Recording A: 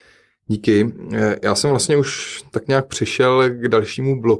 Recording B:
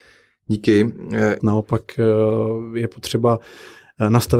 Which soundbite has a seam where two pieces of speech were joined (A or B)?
B